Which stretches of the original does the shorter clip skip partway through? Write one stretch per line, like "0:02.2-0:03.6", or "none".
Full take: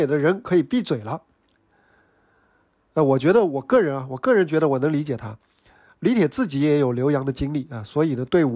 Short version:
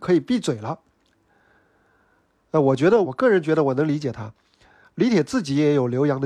0:03.5-0:04.1